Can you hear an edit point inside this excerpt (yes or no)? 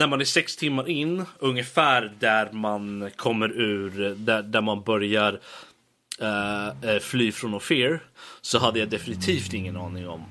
no